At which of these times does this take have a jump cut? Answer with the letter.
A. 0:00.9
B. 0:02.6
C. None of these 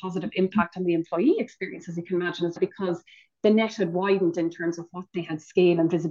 B